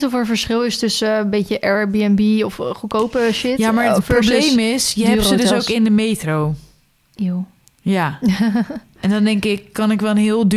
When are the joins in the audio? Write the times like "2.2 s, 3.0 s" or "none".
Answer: none